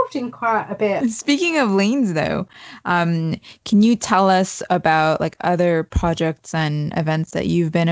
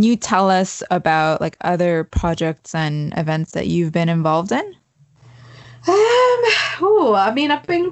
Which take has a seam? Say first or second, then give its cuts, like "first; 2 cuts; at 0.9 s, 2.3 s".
first; 1 cut; at 1.0 s